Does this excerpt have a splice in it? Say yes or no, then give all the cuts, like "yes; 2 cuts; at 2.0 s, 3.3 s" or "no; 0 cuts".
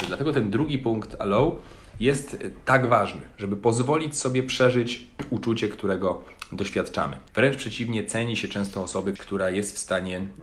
yes; 2 cuts; at 7.3 s, 9.2 s